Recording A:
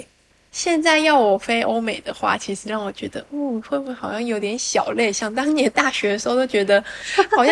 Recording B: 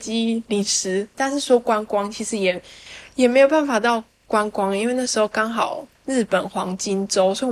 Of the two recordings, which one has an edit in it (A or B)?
B